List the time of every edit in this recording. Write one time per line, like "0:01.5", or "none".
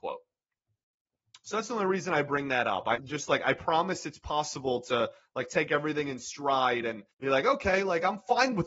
0:03.0
0:07.1